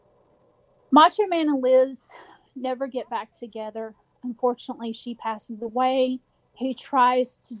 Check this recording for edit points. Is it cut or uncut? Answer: uncut